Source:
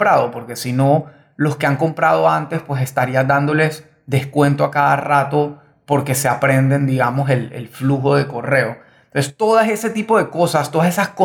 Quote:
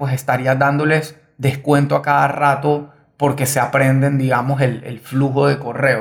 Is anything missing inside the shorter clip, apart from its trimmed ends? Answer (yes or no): no